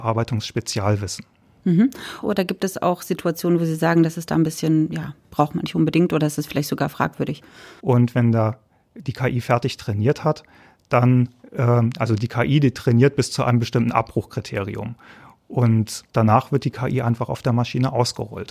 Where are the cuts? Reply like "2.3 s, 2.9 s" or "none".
2.2 s, 7.8 s, 16.1 s